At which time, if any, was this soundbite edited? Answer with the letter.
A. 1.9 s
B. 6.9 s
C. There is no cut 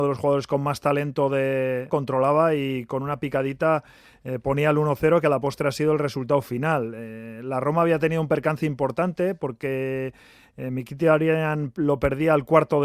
A